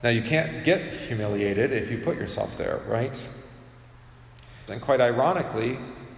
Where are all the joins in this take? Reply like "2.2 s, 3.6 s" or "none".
4.7 s